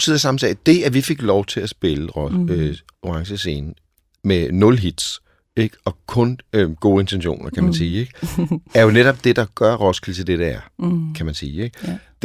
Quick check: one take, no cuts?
yes; 0 cuts

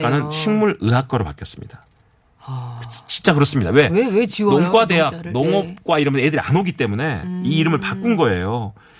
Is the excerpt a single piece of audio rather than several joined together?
yes; 0 cuts

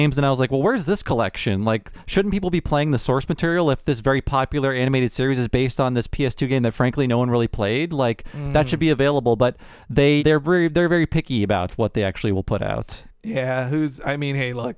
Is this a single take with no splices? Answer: no; 1 cut; at 10.2 s

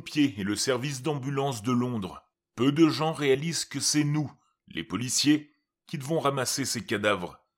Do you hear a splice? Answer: no; 0 cuts

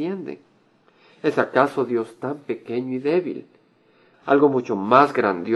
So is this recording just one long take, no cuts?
no; 1 cut; at 4.1 s

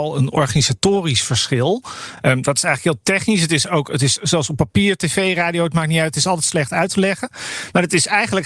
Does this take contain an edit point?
no; 0 cuts

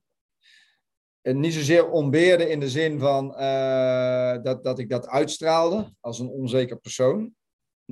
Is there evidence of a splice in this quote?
no; 0 cuts

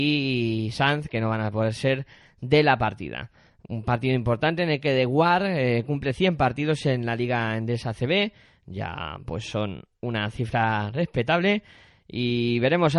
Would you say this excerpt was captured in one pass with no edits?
yes; 0 cuts

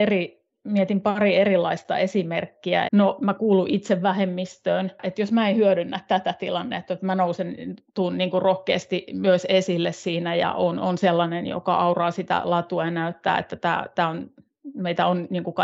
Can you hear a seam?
yes; 1 cut; at 2.8 s

